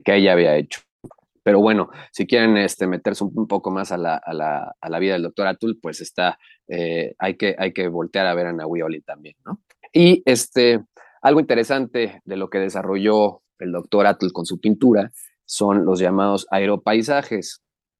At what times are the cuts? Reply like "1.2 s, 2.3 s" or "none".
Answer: 9.8 s